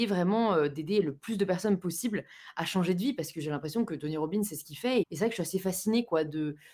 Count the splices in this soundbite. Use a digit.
1